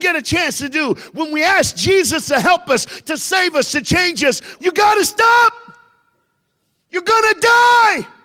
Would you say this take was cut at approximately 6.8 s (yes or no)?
no